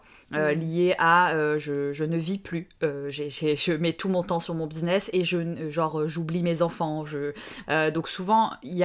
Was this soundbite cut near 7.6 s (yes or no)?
yes